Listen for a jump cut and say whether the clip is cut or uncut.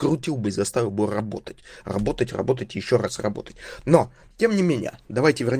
uncut